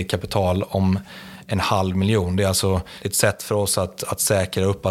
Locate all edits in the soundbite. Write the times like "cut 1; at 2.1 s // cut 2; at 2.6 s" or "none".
none